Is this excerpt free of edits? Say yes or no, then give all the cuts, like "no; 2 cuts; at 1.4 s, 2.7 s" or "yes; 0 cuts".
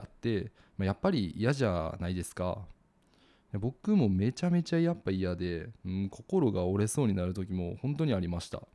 yes; 0 cuts